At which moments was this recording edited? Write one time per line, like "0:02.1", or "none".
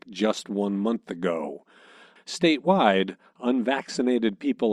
0:02.2

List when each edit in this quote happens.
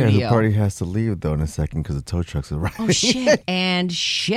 0:03.4

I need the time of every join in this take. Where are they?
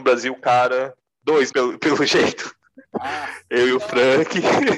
0:01.5

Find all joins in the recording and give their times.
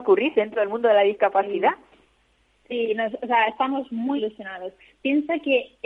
0:04.2

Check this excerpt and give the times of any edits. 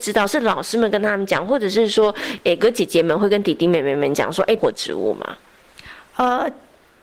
0:02.6
0:04.6

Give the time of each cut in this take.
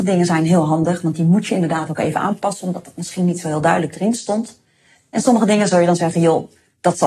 none

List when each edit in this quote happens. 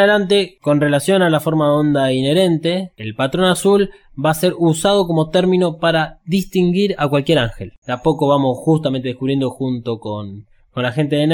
0:07.8

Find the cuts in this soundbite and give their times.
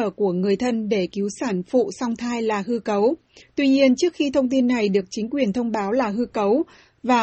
0:03.4

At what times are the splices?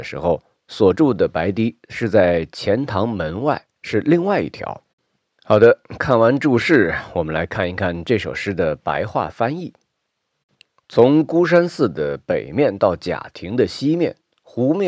none

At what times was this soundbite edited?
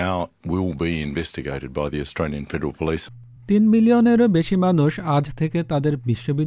none

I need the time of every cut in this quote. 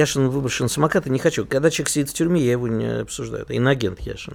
none

